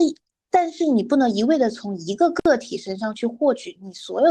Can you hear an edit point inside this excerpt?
no; 0 cuts

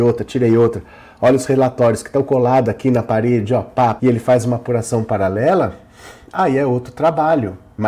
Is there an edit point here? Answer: yes; 1 cut; at 4.0 s

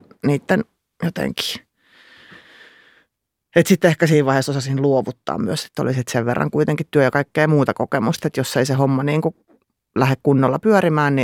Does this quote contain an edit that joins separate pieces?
no; 0 cuts

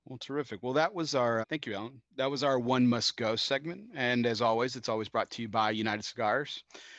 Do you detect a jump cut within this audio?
yes; 1 cut; at 1.4 s

